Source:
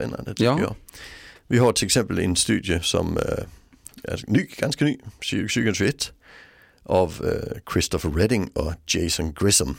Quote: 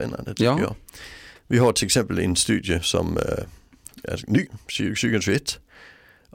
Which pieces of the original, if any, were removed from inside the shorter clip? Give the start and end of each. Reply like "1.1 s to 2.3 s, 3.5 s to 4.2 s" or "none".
4.5 s to 5.0 s